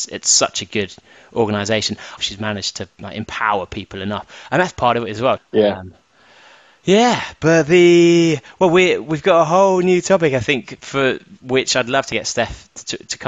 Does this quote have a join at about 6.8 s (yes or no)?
no